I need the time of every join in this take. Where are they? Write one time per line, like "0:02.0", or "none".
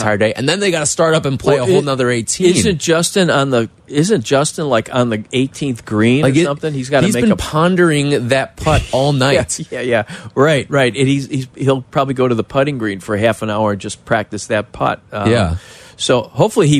none